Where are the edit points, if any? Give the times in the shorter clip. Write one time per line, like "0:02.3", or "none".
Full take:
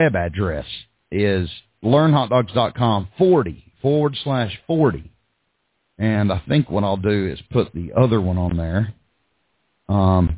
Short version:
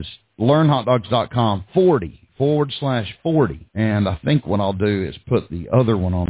0:03.7